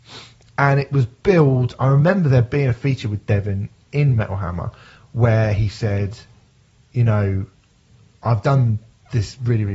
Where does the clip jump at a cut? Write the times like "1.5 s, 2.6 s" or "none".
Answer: none